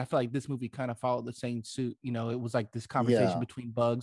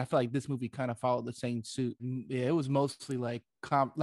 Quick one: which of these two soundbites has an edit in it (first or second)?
second